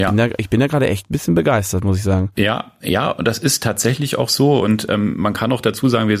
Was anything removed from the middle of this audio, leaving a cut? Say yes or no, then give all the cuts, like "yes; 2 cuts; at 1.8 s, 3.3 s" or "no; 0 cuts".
no; 0 cuts